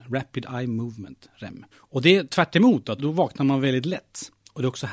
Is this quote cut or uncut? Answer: cut